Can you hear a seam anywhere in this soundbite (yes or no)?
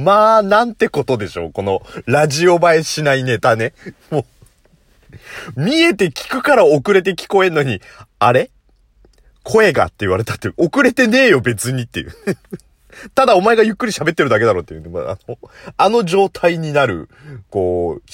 no